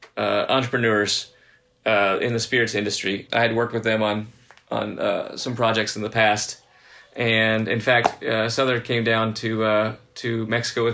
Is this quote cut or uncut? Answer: cut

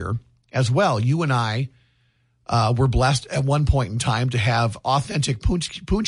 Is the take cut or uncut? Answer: uncut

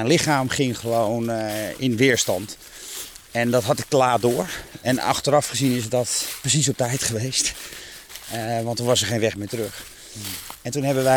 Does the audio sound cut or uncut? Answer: uncut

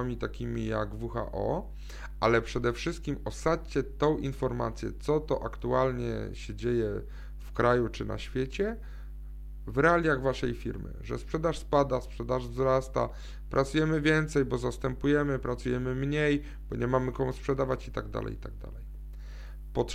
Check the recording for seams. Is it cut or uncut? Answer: uncut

